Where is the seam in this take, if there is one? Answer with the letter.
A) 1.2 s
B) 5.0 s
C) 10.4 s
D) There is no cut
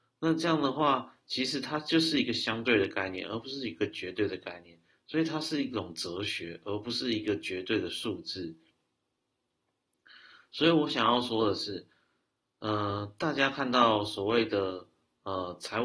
D